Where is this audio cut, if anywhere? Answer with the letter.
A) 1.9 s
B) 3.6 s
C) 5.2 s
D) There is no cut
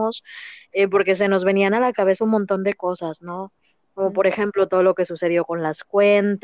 D